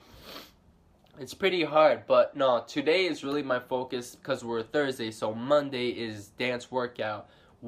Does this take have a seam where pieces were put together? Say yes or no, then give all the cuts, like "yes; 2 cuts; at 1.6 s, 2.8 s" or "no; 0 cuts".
no; 0 cuts